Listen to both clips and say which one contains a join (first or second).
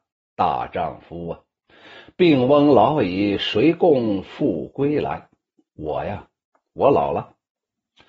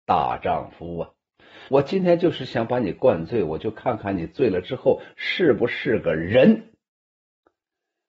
second